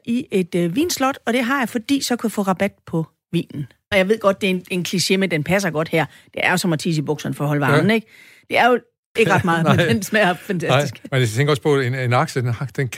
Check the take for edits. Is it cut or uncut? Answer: cut